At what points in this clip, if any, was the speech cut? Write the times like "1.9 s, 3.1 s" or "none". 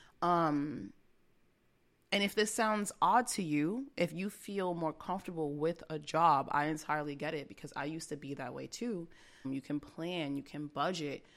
9.4 s